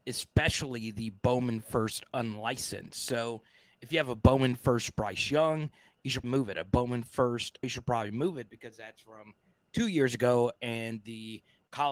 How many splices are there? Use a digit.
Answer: 2